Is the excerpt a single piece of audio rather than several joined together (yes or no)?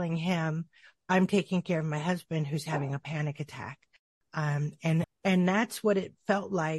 no